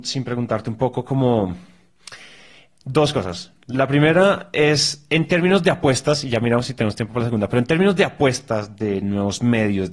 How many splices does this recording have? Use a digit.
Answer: 0